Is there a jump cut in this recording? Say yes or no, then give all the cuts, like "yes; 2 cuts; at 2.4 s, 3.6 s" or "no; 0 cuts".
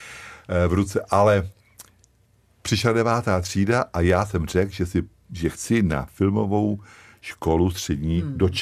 no; 0 cuts